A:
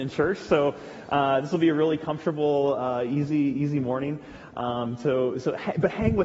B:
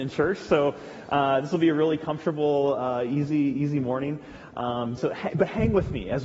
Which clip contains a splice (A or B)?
B